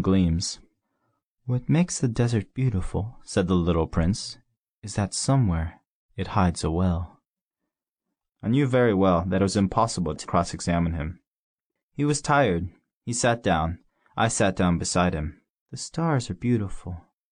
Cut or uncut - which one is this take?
cut